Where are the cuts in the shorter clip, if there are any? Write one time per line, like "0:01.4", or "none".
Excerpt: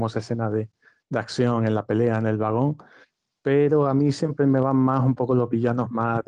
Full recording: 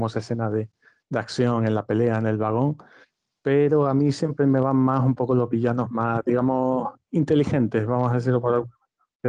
none